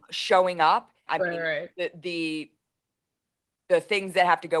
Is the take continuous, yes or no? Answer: no